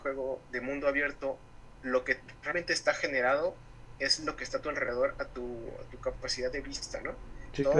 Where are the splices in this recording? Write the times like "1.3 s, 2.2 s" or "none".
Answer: none